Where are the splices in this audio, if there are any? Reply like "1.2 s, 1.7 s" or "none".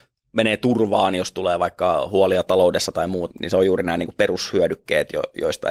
3.3 s

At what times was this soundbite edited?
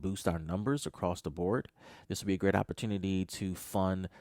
2.0 s

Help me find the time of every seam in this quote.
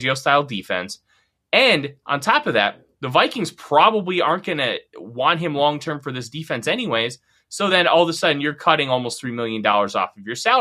none

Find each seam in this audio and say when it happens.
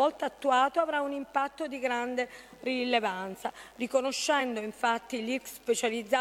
none

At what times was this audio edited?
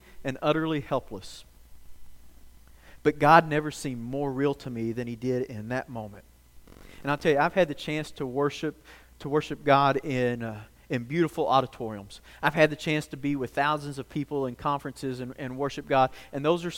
none

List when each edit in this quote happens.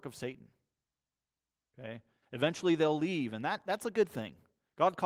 none

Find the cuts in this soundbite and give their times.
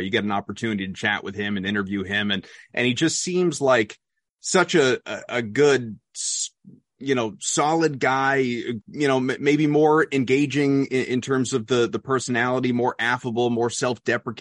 8.8 s

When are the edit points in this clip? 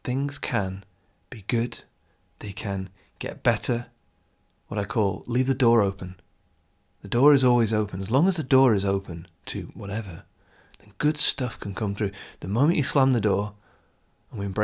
none

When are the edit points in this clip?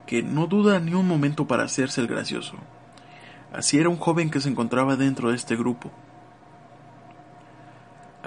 none

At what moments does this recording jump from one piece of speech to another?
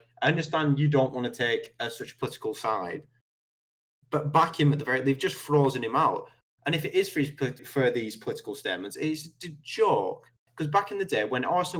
7.6 s, 10.5 s

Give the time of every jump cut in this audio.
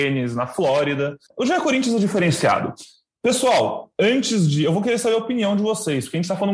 none

